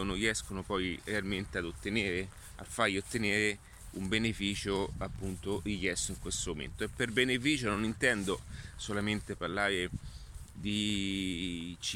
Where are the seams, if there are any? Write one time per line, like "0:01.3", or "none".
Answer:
none